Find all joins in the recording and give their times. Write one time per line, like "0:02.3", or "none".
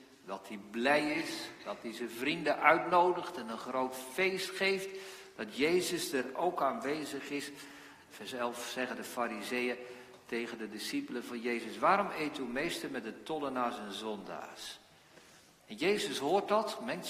0:08.1